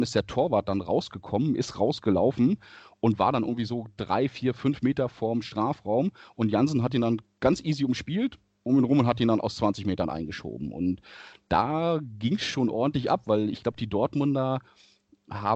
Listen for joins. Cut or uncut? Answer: uncut